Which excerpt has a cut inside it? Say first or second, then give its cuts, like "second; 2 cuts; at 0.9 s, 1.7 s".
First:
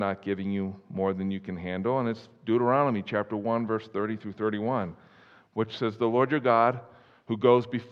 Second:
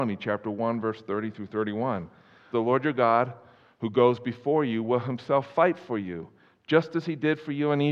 second; 1 cut; at 2.5 s